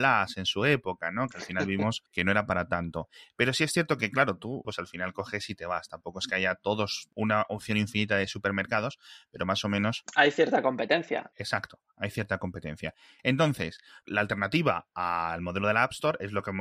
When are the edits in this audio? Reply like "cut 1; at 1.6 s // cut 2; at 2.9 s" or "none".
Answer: cut 1; at 4.6 s // cut 2; at 14.0 s